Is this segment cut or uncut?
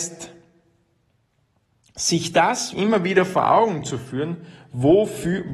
cut